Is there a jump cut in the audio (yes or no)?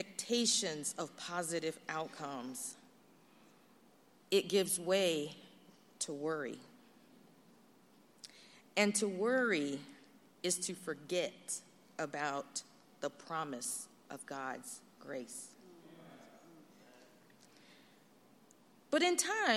no